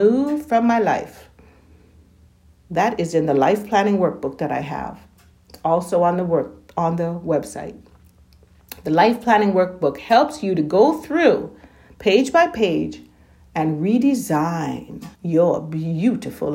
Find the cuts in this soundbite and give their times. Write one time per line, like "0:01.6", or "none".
0:15.1